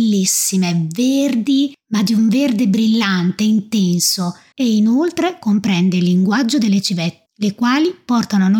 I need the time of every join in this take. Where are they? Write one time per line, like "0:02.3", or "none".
0:04.5
0:07.3